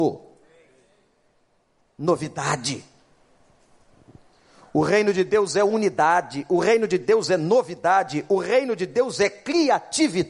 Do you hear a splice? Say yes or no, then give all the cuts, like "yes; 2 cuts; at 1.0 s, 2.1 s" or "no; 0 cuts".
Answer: no; 0 cuts